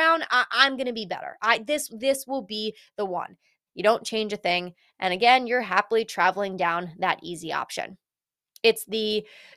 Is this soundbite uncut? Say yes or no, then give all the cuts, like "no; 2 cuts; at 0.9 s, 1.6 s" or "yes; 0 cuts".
no; 2 cuts; at 3.7 s, 4.9 s